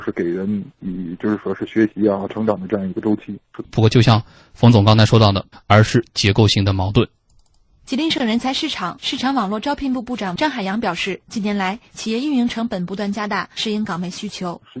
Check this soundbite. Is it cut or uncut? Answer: cut